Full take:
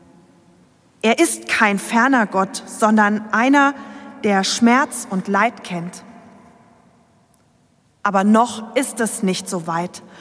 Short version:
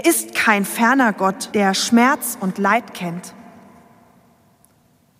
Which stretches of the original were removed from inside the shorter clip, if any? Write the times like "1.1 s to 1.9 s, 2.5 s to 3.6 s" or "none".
2.6 s to 4.2 s